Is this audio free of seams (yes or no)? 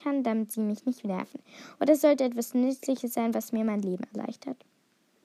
yes